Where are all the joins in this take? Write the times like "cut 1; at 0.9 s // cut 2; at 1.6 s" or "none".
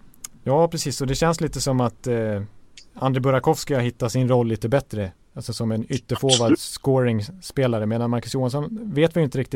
none